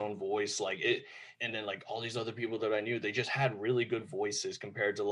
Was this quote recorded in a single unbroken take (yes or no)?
no